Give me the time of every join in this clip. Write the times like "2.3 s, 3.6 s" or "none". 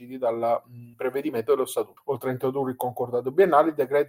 0.9 s, 2.0 s